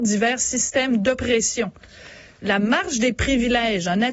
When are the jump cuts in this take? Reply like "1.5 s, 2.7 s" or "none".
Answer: none